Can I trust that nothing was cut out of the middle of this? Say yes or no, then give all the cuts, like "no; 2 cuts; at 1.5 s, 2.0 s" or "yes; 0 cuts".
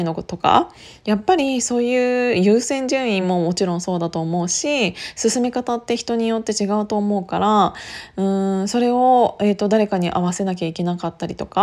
yes; 0 cuts